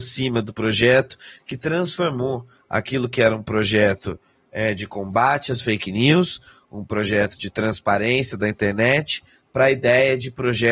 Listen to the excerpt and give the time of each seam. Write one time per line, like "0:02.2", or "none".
none